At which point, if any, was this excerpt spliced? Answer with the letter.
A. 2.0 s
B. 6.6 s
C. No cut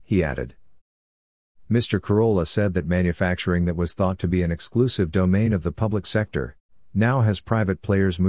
C